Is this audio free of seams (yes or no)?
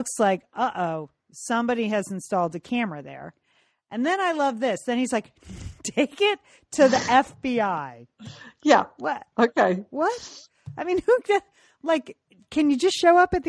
yes